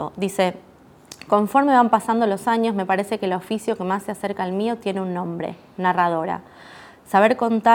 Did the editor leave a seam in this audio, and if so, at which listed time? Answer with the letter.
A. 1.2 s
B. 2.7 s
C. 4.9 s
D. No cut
D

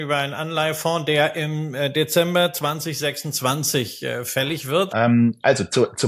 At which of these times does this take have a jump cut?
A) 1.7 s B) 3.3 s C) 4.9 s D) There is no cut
C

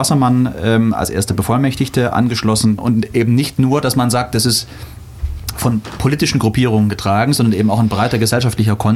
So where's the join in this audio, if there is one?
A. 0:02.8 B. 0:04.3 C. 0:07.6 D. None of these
A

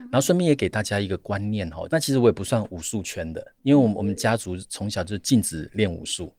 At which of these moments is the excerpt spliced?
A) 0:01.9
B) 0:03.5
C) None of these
A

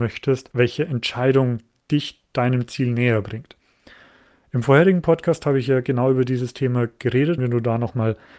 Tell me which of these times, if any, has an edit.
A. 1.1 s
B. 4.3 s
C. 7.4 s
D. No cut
C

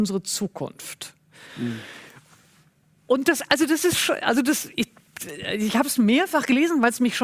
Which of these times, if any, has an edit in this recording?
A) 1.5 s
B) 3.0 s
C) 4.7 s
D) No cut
D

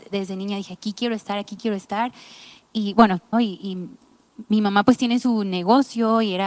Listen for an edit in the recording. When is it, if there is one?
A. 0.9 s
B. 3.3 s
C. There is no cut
B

